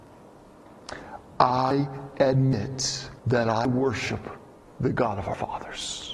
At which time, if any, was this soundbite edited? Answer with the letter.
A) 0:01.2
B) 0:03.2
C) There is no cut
B